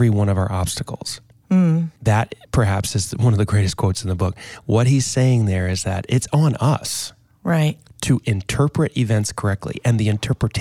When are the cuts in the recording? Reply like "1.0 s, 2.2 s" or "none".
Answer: 2.0 s